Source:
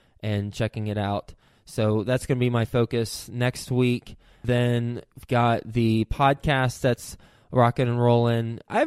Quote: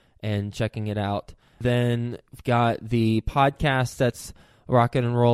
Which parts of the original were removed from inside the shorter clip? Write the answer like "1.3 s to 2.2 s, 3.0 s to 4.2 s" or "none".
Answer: 1.5 s to 4.4 s